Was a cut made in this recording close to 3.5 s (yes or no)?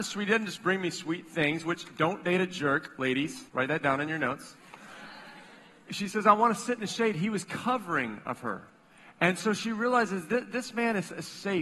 yes